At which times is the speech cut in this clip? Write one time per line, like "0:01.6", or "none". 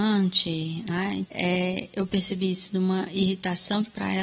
0:01.3

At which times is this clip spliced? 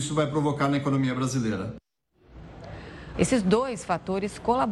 0:03.1

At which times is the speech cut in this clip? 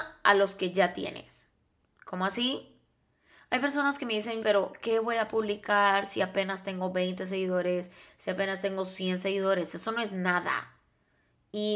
0:04.4

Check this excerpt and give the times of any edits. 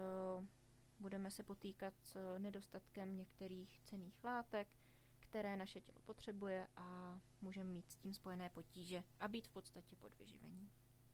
none

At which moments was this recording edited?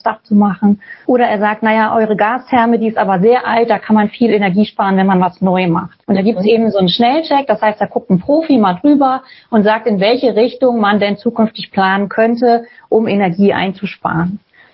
0:01.0
0:06.0

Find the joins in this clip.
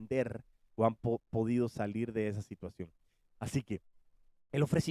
0:03.4

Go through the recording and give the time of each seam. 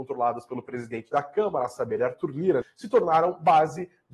0:02.6

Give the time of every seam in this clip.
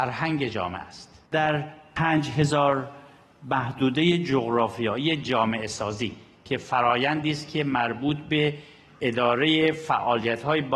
0:01.3

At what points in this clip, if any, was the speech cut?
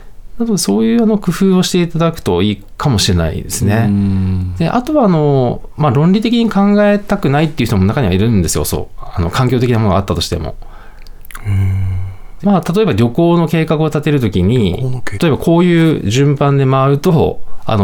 0:12.4
0:15.1

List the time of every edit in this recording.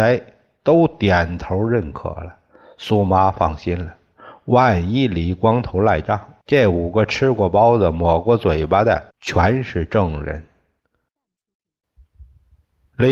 0:06.4
0:09.1

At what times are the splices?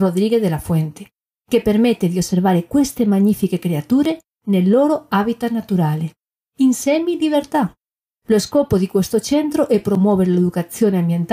none

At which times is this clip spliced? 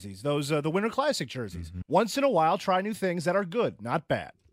0:01.8

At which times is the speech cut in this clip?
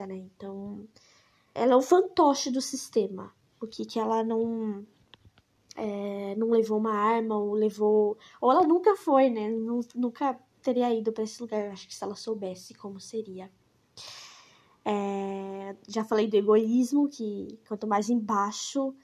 0:01.6

